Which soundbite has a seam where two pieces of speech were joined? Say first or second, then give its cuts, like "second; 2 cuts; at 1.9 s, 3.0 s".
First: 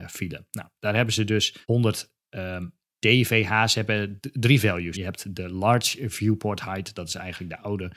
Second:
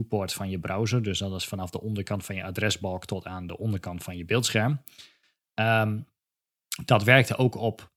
first; 2 cuts; at 1.6 s, 4.9 s